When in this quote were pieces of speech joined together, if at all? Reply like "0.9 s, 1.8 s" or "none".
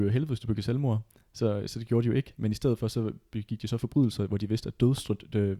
none